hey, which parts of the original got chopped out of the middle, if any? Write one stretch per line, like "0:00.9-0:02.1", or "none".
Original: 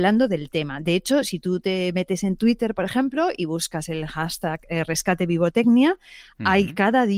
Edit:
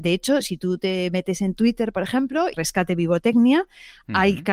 0:03.4-0:04.8